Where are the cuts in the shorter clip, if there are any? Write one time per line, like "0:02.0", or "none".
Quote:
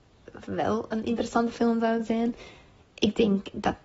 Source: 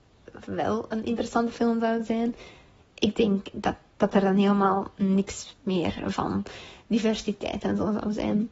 none